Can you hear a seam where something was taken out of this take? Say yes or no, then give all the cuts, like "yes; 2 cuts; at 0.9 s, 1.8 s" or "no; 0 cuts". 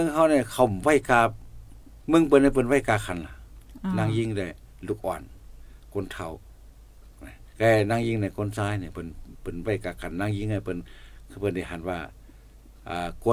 yes; 1 cut; at 7.5 s